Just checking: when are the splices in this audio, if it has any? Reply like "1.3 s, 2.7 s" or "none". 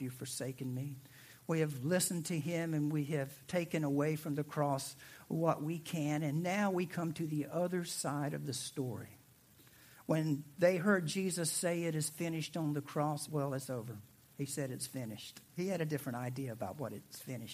13.3 s